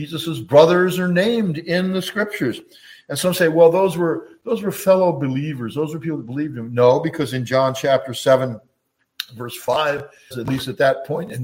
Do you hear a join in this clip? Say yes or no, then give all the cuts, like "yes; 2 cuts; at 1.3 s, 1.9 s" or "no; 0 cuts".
yes; 1 cut; at 10.3 s